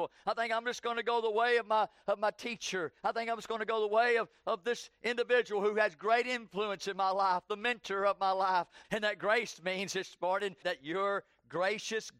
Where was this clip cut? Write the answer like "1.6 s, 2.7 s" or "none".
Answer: 8.8 s, 10.6 s